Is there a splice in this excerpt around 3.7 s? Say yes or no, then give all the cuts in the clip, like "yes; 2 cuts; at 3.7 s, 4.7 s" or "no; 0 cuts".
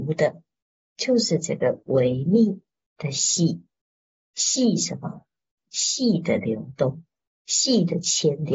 no; 0 cuts